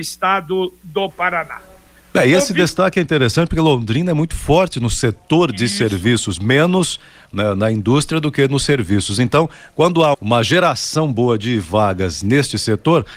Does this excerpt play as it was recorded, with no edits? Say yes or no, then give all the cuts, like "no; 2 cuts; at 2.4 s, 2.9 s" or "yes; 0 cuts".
no; 1 cut; at 10.1 s